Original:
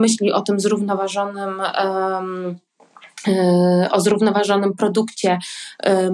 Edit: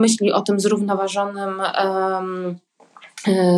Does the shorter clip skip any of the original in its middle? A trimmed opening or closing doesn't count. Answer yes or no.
no